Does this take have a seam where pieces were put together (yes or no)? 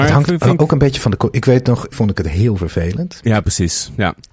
yes